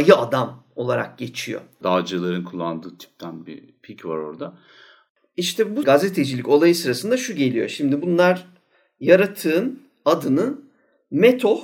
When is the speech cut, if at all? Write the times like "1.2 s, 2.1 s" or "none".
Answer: 1.8 s